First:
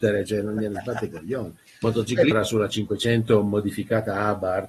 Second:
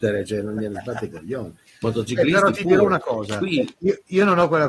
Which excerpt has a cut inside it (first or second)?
first